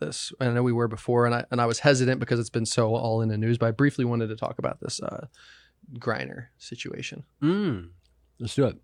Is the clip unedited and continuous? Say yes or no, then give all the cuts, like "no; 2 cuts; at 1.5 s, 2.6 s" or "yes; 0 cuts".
yes; 0 cuts